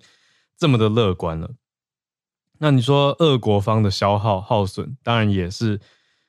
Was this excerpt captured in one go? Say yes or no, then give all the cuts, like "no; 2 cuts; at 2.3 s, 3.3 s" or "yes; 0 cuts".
yes; 0 cuts